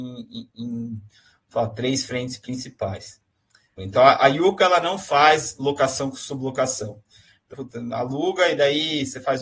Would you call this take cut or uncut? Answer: cut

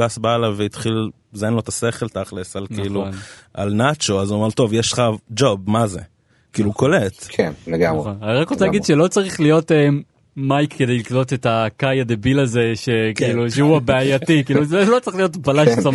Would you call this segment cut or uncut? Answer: uncut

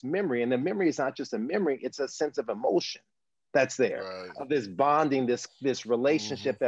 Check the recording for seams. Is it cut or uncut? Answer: uncut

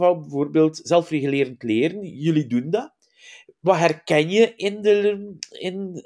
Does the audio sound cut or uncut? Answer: uncut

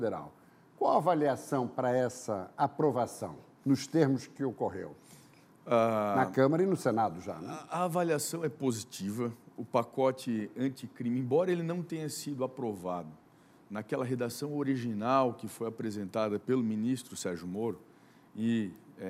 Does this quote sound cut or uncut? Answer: uncut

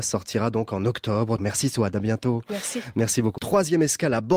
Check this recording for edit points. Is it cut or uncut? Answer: cut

